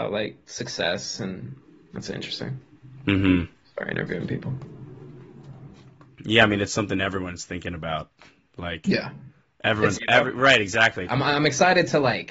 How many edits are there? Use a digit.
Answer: 2